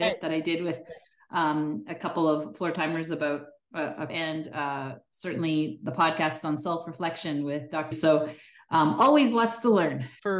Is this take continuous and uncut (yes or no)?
no